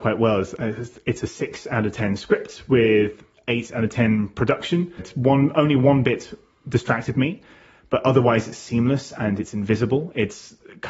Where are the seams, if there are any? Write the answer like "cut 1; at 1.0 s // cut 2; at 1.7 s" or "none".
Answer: cut 1; at 5.0 s